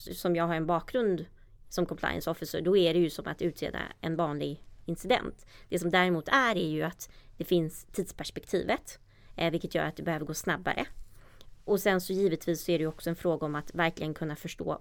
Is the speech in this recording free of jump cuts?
yes; 0 cuts

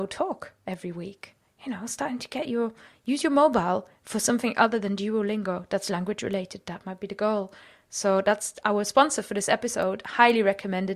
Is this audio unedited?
yes; 0 cuts

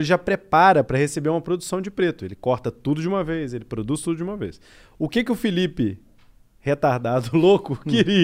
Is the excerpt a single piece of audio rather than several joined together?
yes; 0 cuts

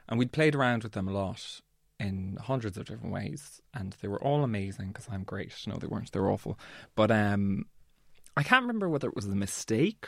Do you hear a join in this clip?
no; 0 cuts

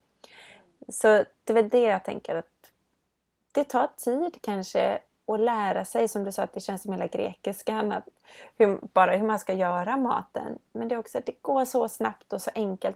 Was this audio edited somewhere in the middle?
no; 0 cuts

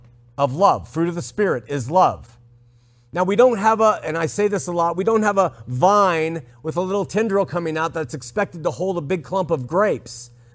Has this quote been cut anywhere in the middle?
no; 0 cuts

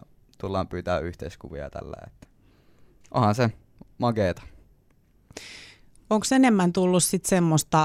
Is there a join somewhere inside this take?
no; 0 cuts

